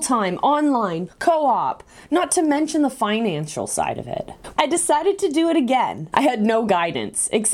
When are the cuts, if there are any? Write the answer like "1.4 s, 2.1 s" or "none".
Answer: 1.1 s, 4.5 s, 6.1 s